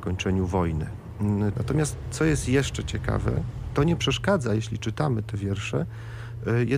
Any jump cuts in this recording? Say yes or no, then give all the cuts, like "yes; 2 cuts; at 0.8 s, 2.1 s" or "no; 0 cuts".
yes; 1 cut; at 1.5 s